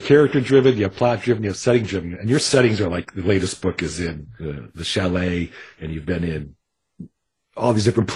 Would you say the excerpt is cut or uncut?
uncut